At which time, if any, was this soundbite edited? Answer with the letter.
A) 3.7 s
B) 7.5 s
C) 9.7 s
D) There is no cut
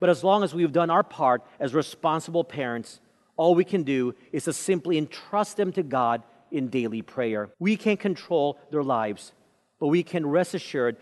B